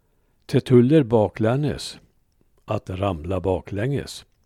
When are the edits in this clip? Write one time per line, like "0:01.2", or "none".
none